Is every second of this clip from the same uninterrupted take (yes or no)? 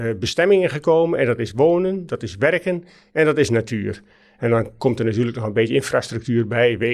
yes